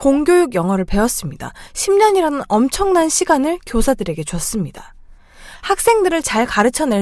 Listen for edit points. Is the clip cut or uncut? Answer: uncut